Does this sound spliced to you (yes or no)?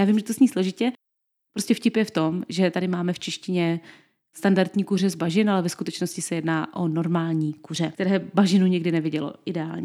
no